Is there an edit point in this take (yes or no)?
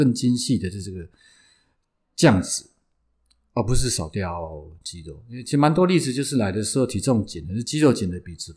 no